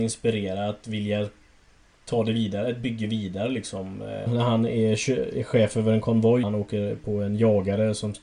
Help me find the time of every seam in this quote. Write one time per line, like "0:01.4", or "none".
0:04.3
0:06.4